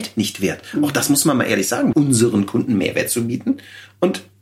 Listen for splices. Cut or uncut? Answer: cut